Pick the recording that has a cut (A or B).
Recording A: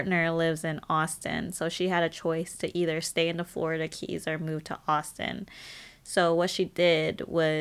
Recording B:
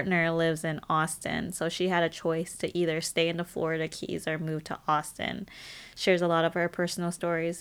B